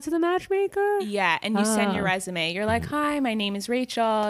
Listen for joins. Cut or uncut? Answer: uncut